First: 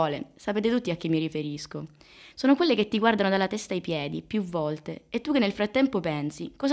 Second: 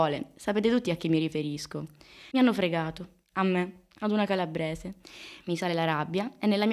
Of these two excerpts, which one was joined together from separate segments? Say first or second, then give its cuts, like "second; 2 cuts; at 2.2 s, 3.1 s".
second; 2 cuts; at 2.3 s, 5.4 s